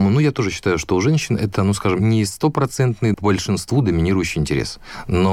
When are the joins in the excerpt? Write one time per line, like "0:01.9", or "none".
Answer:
0:03.1